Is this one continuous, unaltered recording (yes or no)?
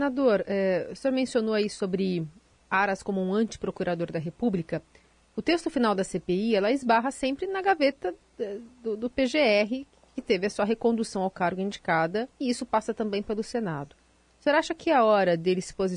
yes